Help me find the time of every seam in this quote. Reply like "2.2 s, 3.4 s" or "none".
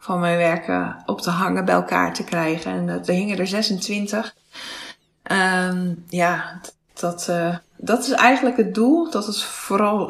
none